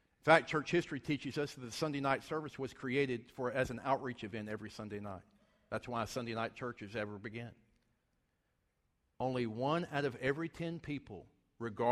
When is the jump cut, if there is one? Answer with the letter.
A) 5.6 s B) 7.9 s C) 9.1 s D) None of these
C